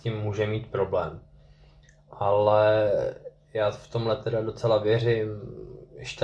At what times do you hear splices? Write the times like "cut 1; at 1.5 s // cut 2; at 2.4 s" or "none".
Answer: none